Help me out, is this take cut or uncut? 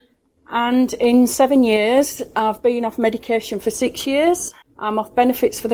cut